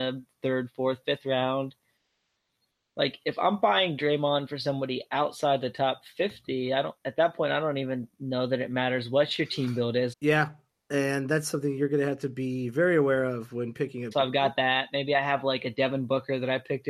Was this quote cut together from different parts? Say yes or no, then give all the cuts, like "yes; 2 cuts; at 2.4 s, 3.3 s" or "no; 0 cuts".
yes; 2 cuts; at 10.1 s, 14.1 s